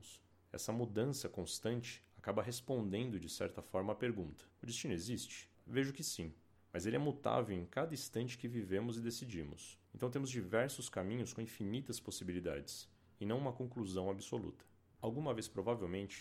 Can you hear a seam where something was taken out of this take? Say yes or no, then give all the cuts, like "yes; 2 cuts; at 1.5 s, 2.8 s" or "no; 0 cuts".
yes; 1 cut; at 15.0 s